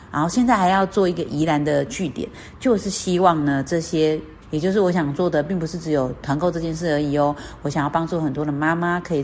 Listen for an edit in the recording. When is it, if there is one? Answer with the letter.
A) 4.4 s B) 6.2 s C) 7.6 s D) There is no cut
A